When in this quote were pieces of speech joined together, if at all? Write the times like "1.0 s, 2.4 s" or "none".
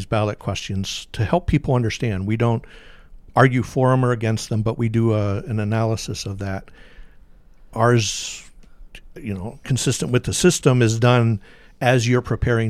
none